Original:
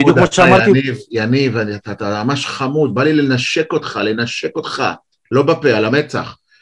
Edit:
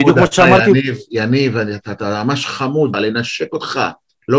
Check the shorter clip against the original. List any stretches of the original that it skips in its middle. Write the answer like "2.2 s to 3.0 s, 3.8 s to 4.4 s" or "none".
2.9 s to 4.0 s

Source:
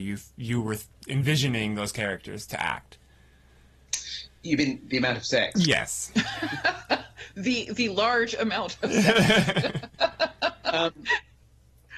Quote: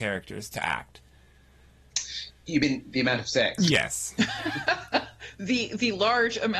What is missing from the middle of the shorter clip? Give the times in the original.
none

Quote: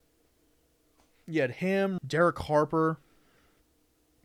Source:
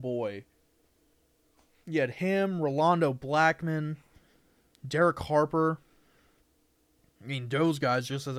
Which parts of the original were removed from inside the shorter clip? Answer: 2.6 s to 4.8 s

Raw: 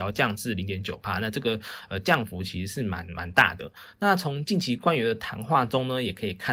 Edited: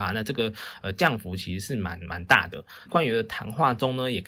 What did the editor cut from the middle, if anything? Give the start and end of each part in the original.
3.9 s to 4.8 s

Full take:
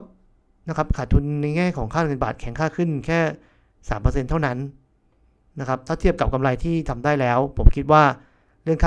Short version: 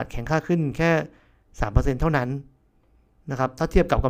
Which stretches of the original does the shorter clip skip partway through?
none

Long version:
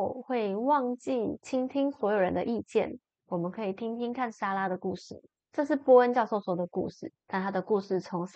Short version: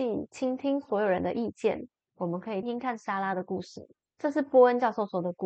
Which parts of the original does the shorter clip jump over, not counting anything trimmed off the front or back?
3.7 s to 4.0 s

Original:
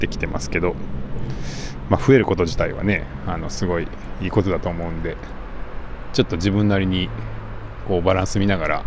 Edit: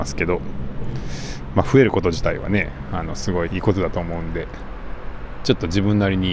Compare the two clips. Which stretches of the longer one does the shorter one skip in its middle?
3.8 s to 4.2 s

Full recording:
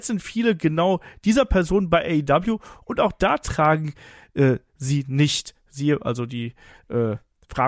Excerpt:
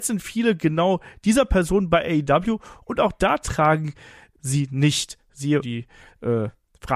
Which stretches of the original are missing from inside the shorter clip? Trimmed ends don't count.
4.3 s to 4.7 s, 6.0 s to 6.3 s

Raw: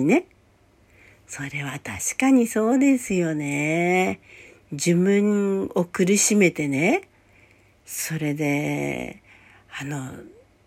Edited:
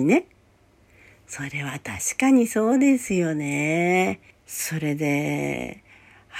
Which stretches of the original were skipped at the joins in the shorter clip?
4.3 s to 7.7 s

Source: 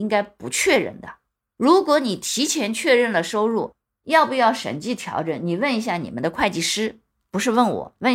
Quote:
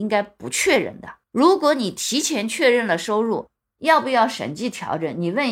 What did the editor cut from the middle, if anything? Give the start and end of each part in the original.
1.2 s to 1.5 s

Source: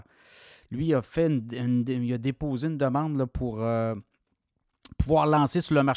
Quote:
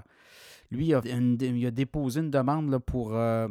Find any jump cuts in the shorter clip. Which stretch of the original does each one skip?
1.0 s to 1.5 s

